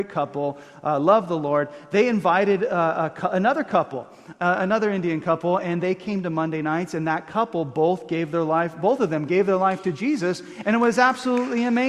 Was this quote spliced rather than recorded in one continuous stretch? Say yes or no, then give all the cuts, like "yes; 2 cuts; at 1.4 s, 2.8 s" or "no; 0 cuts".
no; 0 cuts